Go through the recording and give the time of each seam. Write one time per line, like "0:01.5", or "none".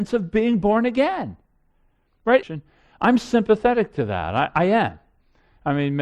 0:02.4